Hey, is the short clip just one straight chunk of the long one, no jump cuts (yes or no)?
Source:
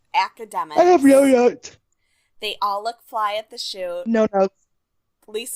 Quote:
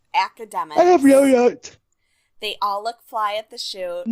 yes